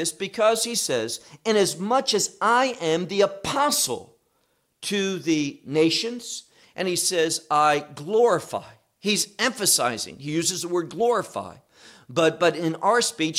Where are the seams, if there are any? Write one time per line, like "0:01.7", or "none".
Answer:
none